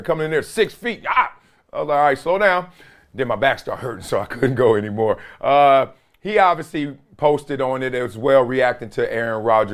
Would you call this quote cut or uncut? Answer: uncut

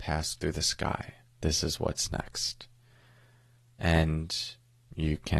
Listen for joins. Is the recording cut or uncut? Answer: cut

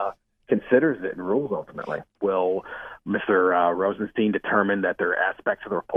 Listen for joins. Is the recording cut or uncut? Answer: cut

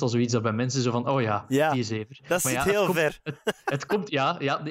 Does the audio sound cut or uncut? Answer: uncut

